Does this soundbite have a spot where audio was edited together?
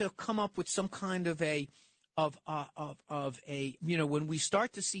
yes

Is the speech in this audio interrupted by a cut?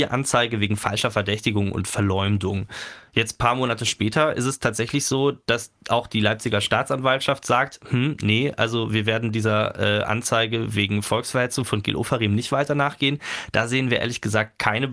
no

